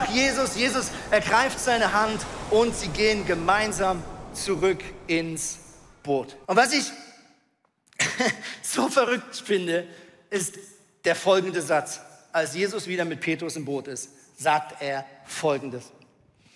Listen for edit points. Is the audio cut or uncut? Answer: cut